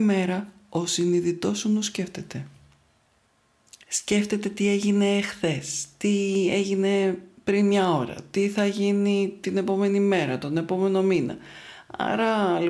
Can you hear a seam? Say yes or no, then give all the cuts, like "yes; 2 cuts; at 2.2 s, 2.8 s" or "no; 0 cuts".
no; 0 cuts